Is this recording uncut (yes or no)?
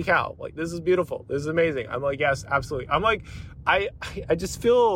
yes